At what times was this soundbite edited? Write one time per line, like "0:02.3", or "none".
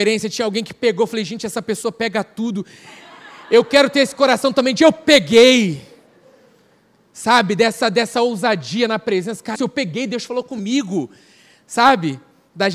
0:09.5